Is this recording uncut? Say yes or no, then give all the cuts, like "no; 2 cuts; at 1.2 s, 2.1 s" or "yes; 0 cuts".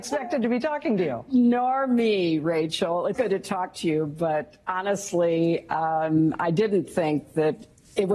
no; 1 cut; at 3.1 s